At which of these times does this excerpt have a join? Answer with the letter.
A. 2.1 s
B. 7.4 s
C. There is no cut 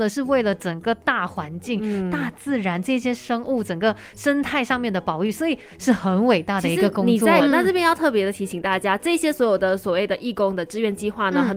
B